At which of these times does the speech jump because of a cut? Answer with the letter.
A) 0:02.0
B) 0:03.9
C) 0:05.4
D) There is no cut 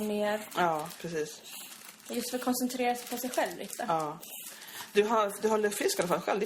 D